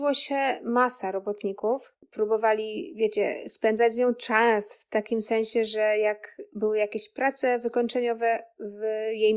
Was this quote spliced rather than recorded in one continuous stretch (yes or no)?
yes